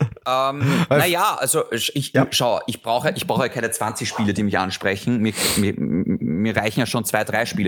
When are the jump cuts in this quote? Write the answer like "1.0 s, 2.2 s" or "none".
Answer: none